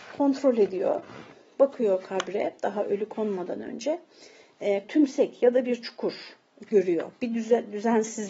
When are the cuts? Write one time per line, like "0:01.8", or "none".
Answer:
0:04.8